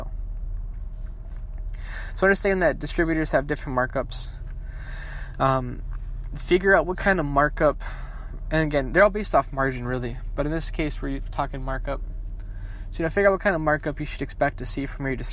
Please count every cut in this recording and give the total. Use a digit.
0